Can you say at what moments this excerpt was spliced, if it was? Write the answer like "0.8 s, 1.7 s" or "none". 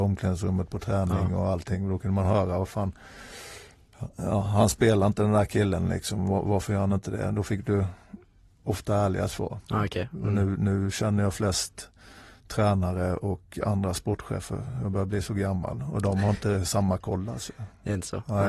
none